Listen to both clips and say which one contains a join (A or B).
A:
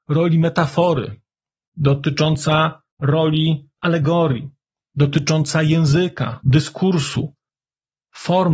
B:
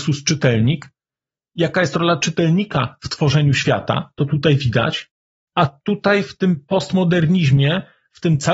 B